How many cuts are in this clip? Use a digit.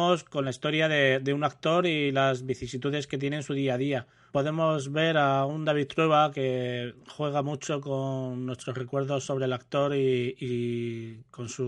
1